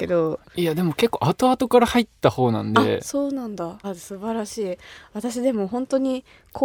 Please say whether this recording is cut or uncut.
cut